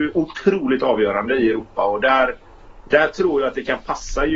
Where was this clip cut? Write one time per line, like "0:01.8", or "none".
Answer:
none